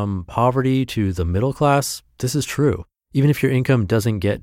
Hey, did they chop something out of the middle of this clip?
yes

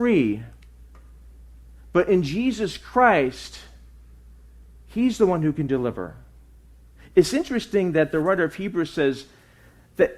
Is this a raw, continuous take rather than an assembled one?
yes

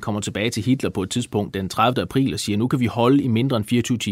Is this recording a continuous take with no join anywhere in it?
no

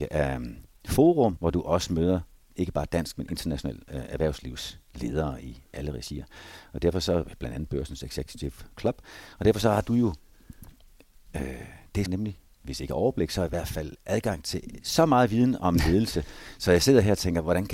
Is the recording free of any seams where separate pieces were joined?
no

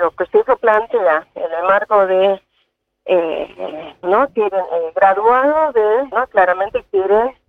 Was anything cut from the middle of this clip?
yes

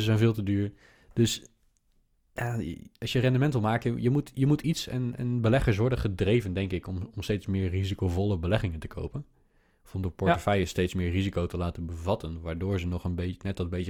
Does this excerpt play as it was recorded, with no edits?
yes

